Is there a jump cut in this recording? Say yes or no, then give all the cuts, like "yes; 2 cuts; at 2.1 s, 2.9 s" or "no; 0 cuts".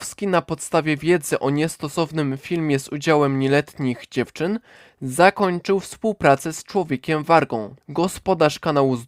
yes; 1 cut; at 7.8 s